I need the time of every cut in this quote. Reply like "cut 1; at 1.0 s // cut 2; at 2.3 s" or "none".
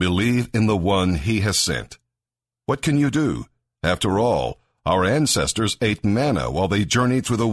cut 1; at 2.5 s

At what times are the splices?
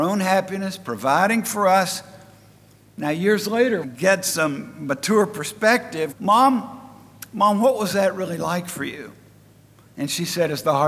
cut 1; at 3.8 s // cut 2; at 6.1 s

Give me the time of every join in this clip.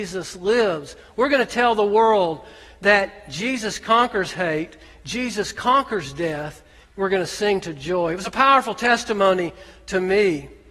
cut 1; at 6.8 s

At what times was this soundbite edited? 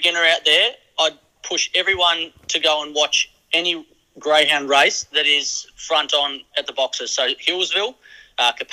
none

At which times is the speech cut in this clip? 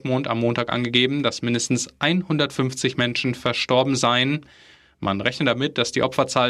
none

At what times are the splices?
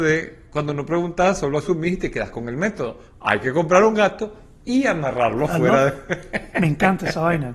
none

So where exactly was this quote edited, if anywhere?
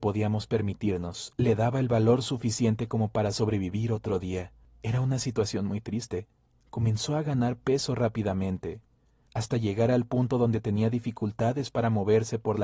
none

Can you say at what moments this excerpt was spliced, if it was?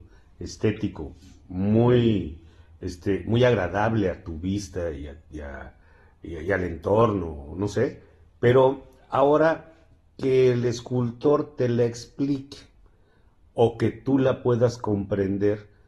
none

